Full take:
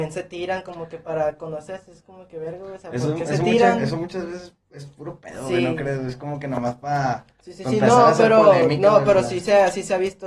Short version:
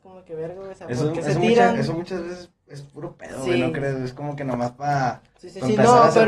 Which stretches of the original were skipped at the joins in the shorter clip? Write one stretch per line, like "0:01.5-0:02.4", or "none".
none